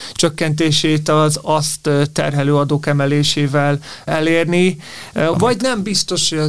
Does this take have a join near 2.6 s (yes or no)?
no